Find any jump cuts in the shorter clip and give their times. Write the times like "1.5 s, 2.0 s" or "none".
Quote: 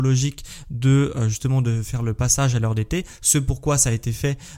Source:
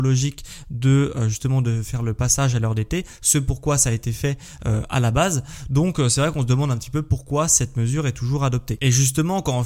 none